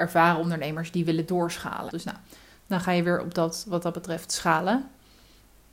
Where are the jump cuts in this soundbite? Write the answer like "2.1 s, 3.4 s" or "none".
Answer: 1.9 s